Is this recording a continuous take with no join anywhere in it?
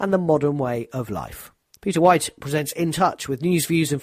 no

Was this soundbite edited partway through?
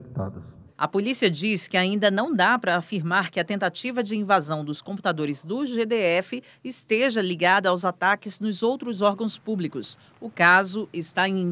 no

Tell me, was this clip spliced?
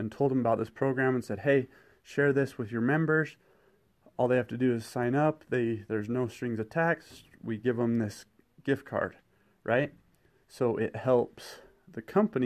no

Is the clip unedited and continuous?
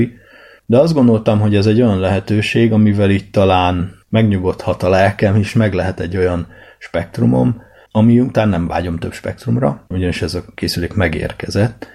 no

